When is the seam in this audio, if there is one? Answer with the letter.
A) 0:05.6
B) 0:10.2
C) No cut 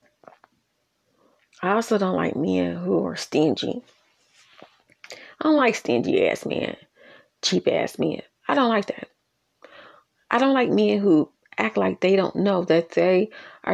C